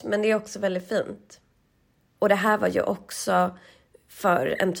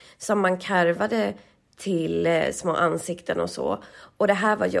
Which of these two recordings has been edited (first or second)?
first